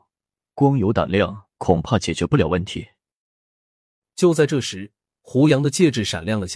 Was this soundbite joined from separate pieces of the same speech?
no; 0 cuts

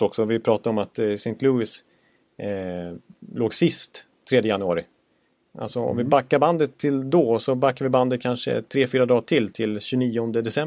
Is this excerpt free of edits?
yes; 0 cuts

